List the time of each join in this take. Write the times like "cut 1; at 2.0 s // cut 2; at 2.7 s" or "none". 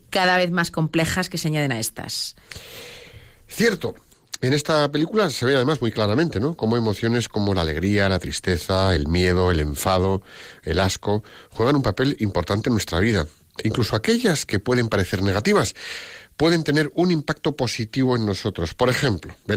none